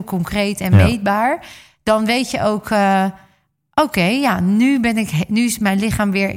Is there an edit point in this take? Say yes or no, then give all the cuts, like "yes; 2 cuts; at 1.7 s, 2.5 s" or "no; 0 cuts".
no; 0 cuts